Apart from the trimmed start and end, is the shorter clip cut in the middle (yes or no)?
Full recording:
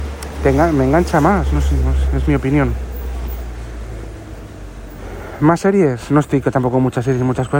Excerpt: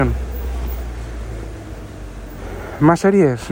no